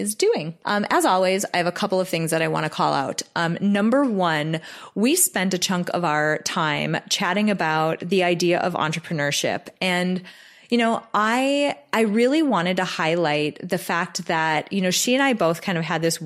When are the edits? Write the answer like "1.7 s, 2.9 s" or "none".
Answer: none